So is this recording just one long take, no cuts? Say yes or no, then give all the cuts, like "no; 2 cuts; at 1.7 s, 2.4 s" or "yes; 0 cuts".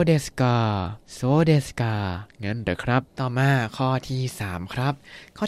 no; 2 cuts; at 1.0 s, 3.1 s